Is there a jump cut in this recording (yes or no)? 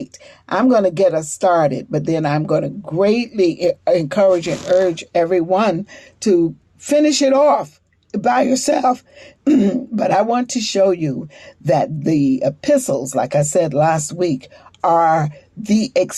no